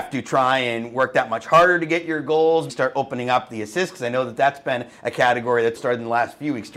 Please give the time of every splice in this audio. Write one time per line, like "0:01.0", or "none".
0:02.7
0:05.8